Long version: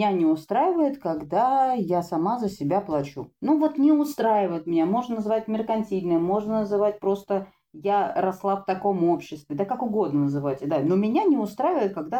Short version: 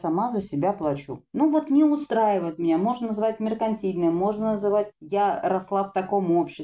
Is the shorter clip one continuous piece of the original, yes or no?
no